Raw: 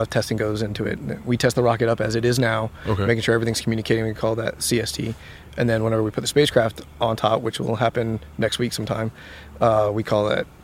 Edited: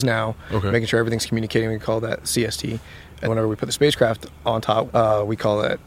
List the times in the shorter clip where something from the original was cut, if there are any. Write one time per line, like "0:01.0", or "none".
0:03.2
0:04.9